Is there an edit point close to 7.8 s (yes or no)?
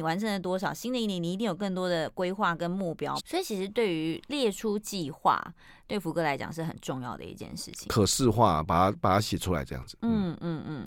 no